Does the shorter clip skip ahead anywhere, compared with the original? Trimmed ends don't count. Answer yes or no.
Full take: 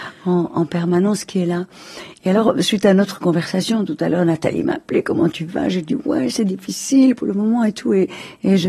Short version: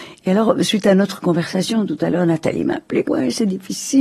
yes